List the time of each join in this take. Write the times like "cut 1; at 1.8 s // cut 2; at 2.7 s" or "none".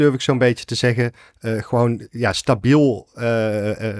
none